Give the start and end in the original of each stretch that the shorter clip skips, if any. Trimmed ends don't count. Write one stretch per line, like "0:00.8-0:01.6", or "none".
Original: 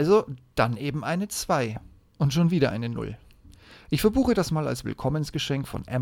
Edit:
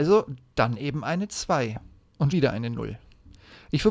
0:02.3-0:02.5